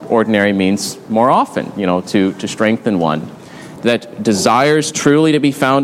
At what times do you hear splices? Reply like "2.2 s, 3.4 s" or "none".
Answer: 3.8 s